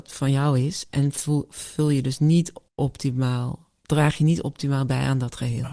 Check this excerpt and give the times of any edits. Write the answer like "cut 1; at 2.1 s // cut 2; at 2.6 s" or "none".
cut 1; at 2.7 s